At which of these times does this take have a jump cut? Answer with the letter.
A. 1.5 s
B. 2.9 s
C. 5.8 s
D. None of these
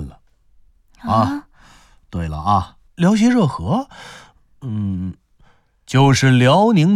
B